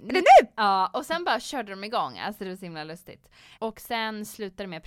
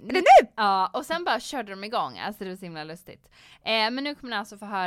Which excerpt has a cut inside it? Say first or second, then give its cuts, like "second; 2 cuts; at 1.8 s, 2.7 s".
first; 1 cut; at 3.6 s